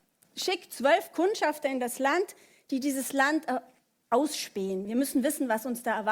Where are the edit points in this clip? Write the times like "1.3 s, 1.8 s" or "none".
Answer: none